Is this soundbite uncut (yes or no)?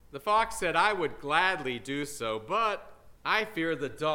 no